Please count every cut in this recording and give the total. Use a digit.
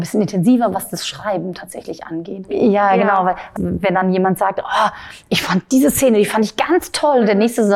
2